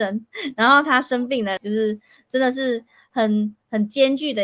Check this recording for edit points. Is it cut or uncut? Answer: cut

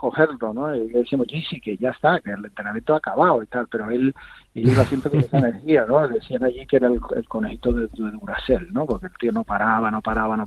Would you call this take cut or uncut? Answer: uncut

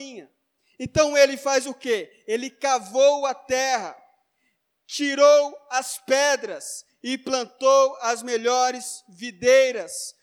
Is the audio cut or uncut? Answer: uncut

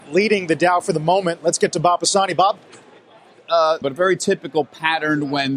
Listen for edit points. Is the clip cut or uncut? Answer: cut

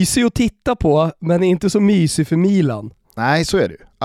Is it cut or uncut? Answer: uncut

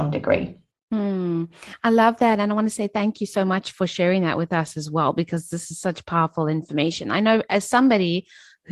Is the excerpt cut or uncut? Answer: uncut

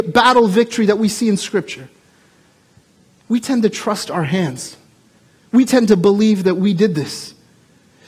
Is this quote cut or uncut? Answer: cut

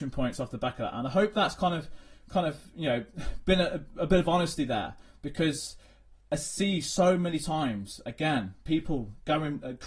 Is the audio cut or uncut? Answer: uncut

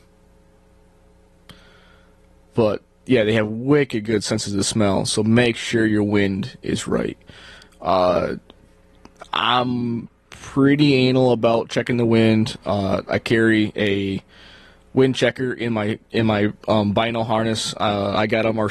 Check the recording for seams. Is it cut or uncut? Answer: uncut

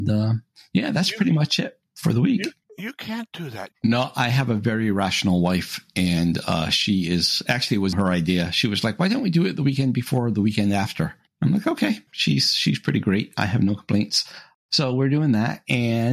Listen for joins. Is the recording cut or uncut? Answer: cut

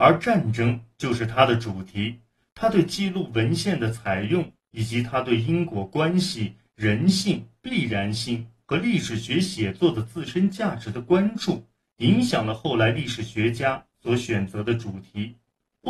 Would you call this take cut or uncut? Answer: uncut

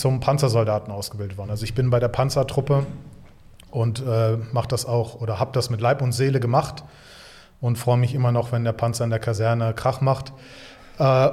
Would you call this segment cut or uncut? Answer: uncut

